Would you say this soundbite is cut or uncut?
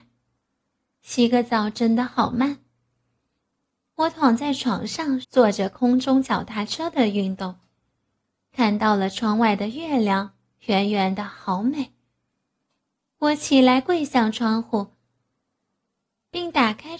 cut